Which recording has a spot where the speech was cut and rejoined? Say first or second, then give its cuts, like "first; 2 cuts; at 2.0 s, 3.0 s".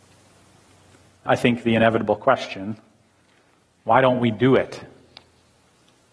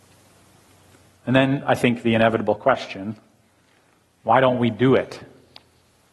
first; 1 cut; at 1.3 s